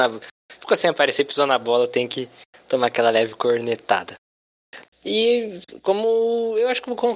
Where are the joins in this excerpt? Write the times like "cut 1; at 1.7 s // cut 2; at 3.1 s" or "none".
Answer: cut 1; at 4.8 s